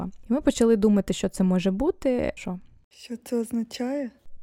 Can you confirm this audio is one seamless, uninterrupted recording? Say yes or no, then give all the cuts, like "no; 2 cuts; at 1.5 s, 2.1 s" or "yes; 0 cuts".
no; 1 cut; at 2.4 s